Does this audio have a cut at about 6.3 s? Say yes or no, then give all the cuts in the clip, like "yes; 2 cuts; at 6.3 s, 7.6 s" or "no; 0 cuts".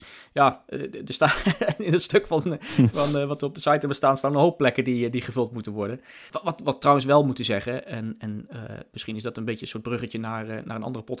yes; 1 cut; at 6.3 s